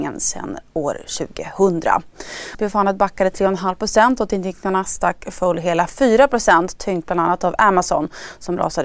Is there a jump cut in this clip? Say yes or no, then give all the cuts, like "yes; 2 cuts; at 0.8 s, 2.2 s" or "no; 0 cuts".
yes; 1 cut; at 2.5 s